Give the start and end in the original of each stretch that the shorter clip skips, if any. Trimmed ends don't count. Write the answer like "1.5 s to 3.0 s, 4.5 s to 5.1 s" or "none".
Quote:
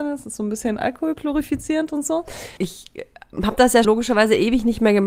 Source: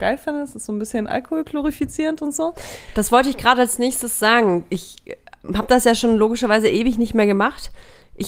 2.9 s to 4.7 s, 6.0 s to 6.2 s